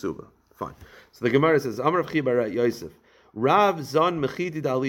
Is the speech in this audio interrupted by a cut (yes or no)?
no